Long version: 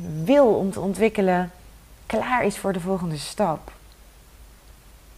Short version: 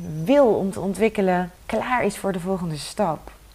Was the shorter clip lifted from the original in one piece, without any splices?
no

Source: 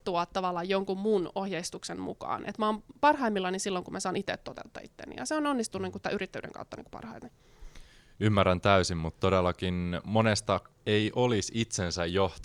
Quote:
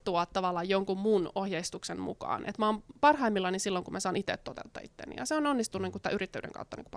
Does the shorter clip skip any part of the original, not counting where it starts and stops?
no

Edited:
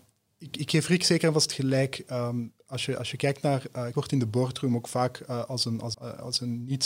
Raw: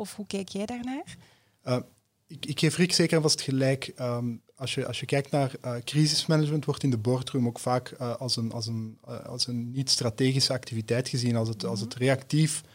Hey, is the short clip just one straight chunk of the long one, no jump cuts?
no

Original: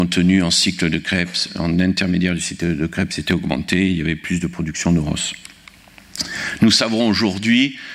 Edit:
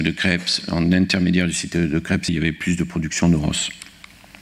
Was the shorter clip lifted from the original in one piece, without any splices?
no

